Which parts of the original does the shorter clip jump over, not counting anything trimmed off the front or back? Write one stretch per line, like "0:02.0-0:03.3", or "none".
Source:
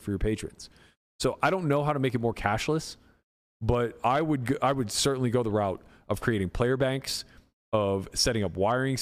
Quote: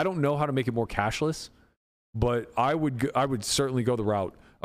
none